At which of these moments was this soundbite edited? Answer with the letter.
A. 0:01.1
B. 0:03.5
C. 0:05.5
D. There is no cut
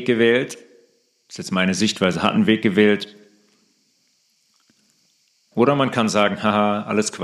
C